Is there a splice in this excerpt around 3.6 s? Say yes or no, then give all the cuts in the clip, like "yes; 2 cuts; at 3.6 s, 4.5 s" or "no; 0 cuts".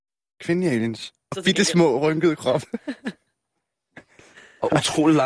no; 1 cut; at 1.3 s